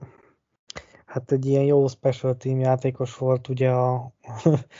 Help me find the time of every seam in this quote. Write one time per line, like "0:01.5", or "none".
none